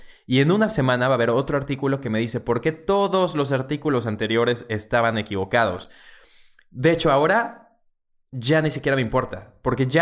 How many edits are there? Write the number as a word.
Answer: zero